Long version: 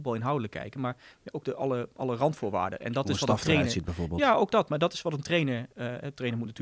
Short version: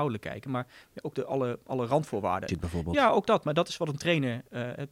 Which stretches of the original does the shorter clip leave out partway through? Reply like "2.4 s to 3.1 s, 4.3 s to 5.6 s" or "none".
2.8 s to 3.7 s